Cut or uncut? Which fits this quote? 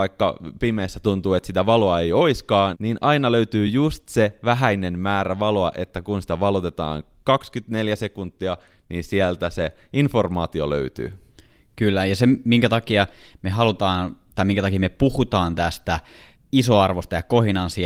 uncut